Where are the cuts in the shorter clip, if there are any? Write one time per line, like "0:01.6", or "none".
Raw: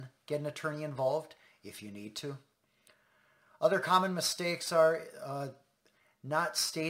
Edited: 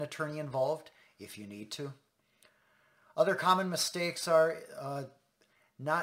none